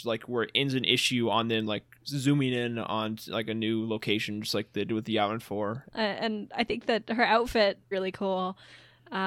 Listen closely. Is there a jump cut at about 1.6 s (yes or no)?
no